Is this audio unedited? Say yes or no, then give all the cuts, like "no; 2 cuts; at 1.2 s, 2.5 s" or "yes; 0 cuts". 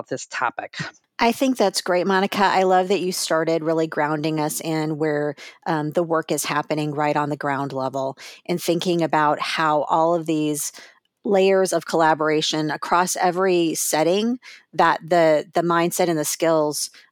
yes; 0 cuts